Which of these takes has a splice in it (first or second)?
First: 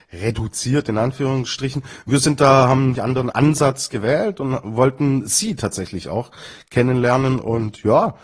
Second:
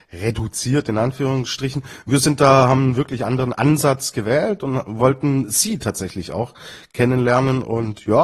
first